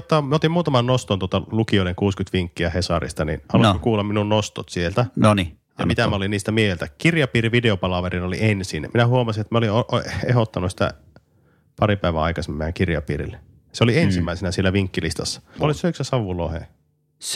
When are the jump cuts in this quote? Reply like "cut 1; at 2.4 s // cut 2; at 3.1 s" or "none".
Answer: cut 1; at 15.6 s